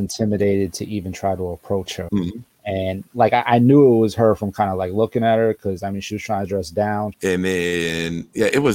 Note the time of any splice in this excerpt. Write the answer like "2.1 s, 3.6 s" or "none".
2.1 s, 7.1 s

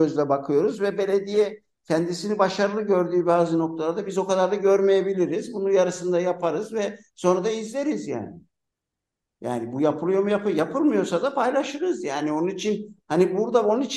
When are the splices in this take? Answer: none

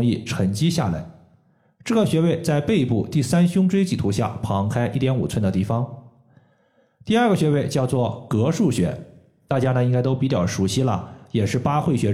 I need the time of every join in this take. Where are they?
none

